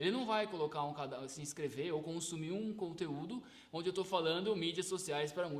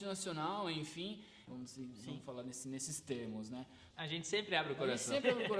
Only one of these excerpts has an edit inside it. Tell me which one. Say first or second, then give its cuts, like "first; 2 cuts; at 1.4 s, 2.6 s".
second; 2 cuts; at 1.5 s, 3.9 s